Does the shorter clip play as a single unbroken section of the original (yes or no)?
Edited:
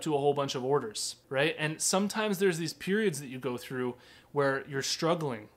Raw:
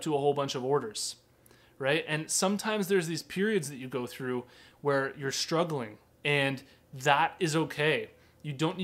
no